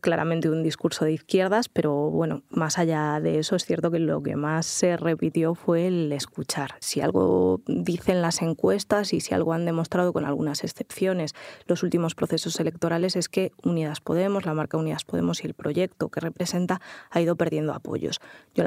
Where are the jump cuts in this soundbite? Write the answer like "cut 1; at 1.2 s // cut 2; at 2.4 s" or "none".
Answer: cut 1; at 6.8 s